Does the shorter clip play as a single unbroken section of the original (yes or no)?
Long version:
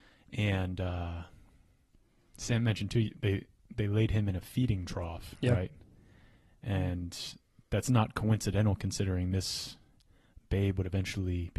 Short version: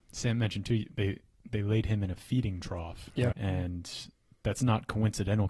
no